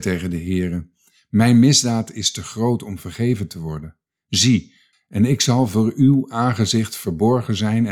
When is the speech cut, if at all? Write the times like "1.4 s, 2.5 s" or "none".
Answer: 4.9 s